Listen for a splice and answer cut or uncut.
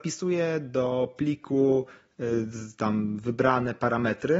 uncut